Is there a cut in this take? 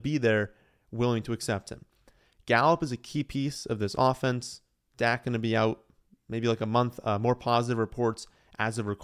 no; 0 cuts

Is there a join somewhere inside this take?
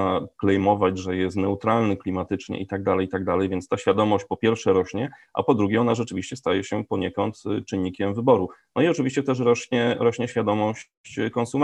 no; 0 cuts

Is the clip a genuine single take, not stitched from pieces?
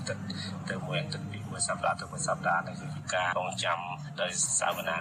no; 1 cut; at 3.3 s

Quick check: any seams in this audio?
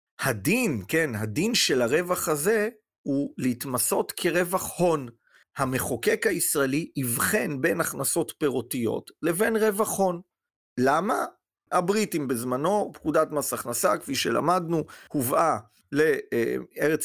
yes; 1 cut; at 11.7 s

